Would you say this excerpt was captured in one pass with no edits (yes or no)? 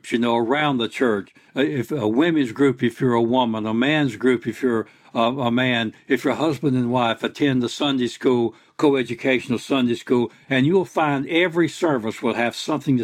yes